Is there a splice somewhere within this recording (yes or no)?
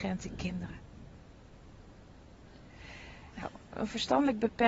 yes